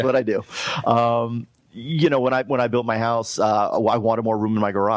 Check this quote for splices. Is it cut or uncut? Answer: uncut